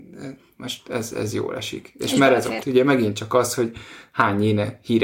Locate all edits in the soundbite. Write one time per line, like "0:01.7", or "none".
0:02.6